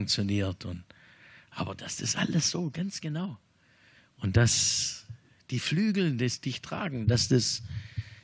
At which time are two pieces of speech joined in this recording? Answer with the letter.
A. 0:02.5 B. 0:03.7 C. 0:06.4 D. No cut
D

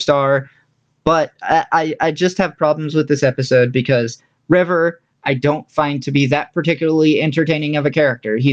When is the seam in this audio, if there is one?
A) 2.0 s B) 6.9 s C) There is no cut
C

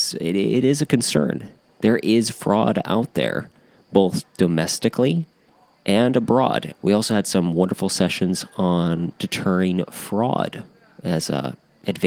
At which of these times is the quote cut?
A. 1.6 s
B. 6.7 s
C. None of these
B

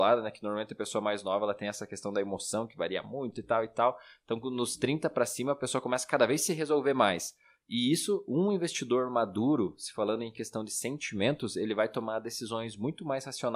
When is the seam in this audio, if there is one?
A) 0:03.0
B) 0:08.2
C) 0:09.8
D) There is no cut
D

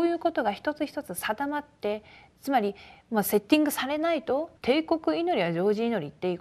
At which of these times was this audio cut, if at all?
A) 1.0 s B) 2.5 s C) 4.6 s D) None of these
C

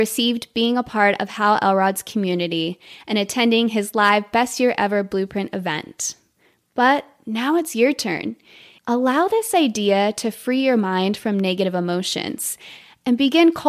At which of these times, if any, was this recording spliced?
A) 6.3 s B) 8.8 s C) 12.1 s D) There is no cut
B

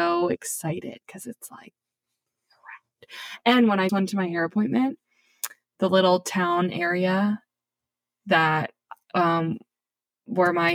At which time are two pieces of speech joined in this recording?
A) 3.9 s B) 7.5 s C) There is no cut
A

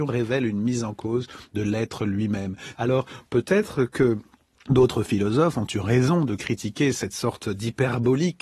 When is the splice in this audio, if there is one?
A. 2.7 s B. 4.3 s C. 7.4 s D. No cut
A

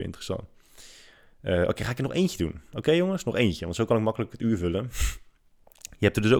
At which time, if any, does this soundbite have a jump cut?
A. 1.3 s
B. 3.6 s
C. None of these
C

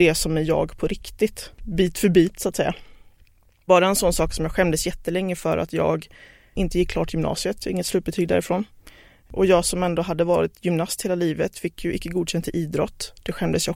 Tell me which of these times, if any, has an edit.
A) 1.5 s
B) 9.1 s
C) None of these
A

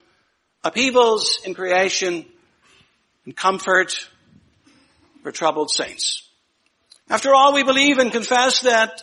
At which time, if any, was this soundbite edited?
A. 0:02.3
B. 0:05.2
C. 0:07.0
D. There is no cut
C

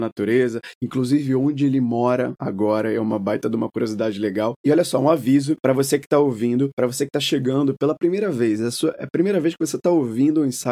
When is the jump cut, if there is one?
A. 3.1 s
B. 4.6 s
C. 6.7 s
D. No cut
D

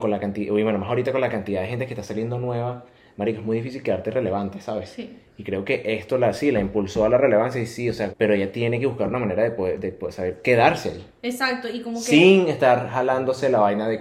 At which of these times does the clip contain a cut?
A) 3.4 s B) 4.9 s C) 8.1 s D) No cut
C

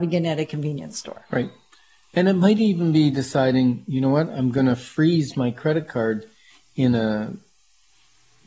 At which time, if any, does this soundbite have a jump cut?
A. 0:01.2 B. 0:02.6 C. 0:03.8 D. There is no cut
D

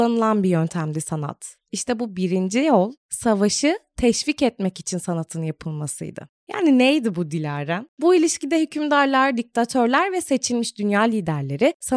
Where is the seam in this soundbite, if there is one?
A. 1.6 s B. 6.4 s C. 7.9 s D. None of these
D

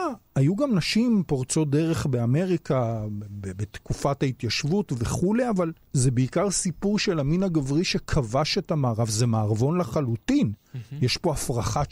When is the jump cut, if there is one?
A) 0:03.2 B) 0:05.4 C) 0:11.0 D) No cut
D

